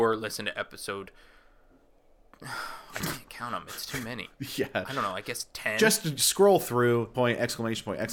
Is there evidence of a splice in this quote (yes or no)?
yes